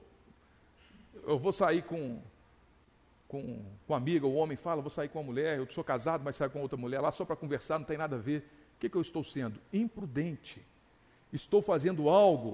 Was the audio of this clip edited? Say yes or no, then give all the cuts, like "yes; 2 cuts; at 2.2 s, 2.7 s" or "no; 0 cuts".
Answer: no; 0 cuts